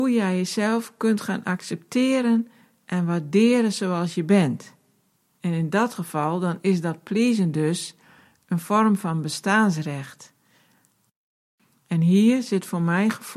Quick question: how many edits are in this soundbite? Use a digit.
1